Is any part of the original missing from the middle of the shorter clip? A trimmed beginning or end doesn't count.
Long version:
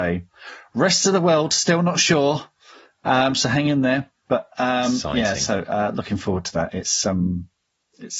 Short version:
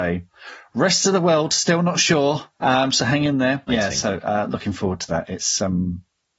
yes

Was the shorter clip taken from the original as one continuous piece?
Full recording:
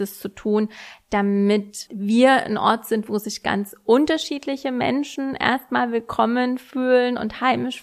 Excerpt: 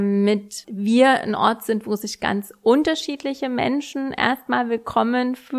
yes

